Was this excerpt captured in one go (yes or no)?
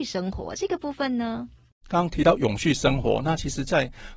yes